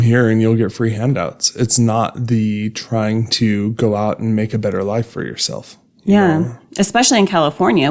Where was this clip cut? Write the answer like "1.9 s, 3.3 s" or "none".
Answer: none